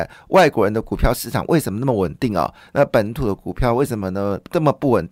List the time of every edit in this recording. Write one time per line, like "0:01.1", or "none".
none